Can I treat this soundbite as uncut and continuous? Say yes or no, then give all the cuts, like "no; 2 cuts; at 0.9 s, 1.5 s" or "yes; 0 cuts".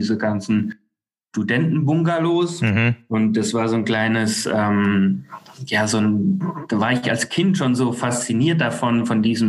yes; 0 cuts